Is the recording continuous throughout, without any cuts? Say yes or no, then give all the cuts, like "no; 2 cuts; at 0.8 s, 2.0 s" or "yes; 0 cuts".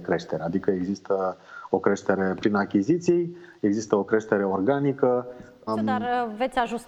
no; 1 cut; at 5.7 s